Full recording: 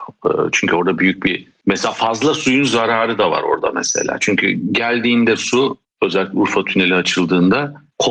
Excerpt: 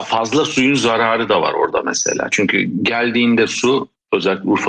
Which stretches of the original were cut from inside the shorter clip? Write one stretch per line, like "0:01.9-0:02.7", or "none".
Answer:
none